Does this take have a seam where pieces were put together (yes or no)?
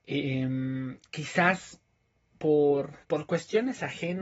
yes